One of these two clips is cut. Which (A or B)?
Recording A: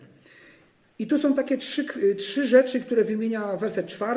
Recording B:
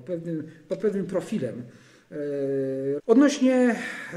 B